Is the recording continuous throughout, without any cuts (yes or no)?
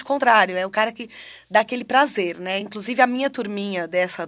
yes